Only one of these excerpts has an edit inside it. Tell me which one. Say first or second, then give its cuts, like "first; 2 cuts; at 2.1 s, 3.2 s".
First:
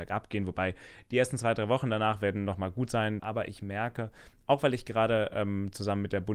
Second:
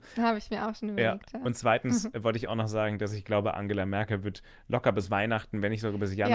first; 1 cut; at 3.2 s